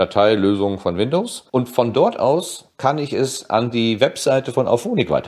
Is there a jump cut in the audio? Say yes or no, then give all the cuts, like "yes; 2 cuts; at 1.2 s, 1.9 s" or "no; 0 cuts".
yes; 1 cut; at 1.5 s